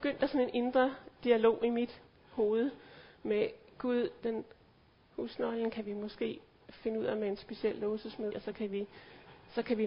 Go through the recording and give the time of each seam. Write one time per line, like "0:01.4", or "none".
0:04.2
0:08.3